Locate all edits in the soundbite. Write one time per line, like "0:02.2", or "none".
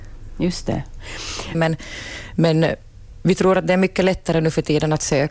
0:01.5